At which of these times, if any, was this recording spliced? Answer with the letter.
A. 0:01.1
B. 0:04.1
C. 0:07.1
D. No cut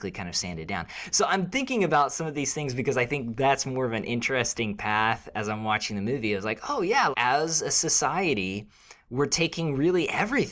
C